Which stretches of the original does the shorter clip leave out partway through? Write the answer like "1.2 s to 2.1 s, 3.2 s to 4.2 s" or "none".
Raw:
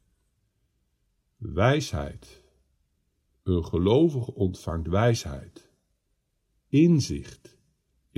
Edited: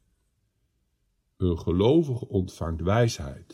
1.4 s to 3.4 s